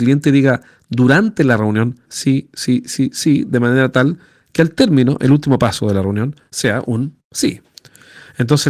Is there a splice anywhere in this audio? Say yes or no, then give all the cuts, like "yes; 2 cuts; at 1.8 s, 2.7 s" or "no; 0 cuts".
yes; 1 cut; at 2.1 s